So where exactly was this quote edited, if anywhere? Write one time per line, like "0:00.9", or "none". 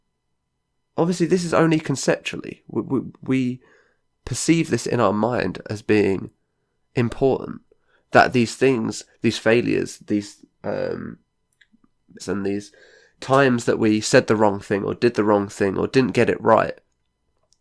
0:12.2